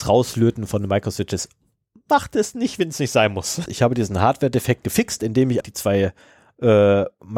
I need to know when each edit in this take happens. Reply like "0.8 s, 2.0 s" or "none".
3.7 s, 5.6 s